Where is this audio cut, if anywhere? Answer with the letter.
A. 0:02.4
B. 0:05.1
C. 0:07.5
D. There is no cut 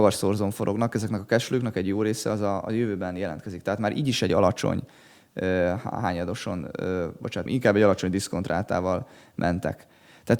C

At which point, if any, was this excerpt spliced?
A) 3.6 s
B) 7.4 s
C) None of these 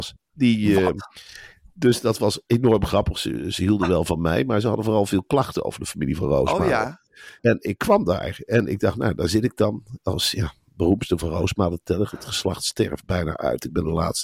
B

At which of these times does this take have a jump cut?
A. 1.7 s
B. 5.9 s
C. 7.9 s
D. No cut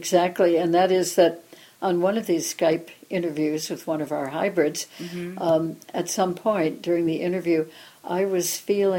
D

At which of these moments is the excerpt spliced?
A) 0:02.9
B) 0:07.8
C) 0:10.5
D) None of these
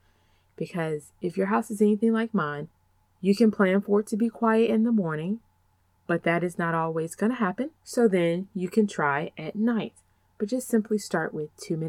B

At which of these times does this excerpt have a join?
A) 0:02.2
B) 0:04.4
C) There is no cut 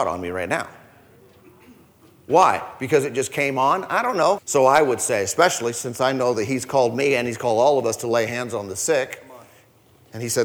B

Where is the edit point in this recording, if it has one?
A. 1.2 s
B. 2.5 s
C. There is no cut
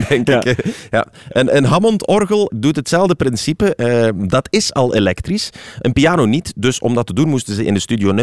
B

